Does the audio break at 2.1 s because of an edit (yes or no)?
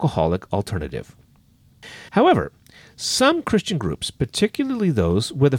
yes